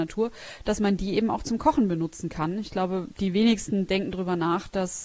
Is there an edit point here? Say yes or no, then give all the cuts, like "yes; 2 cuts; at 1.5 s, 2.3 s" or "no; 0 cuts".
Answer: no; 0 cuts